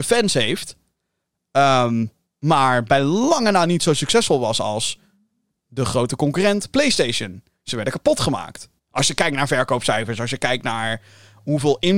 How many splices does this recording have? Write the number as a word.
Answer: one